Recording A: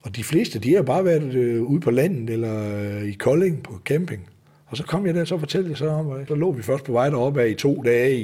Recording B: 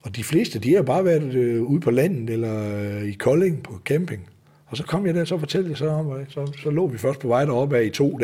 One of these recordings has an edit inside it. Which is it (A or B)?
A